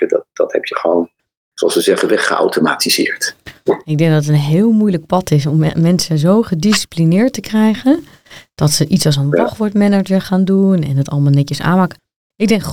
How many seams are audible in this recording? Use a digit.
0